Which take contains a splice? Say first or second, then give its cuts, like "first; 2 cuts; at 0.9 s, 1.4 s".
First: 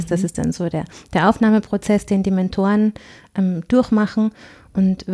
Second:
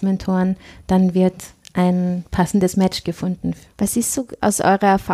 second; 1 cut; at 3.7 s